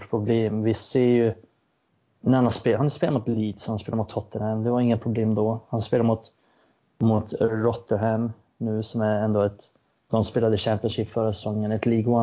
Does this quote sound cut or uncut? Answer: uncut